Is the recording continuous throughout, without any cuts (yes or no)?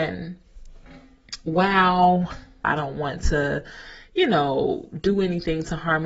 no